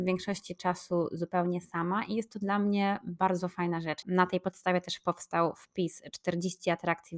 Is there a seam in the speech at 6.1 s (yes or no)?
no